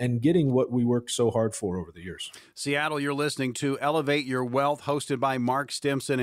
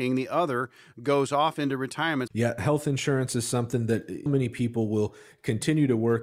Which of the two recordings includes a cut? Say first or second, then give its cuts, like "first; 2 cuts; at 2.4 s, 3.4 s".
second; 2 cuts; at 2.3 s, 4.3 s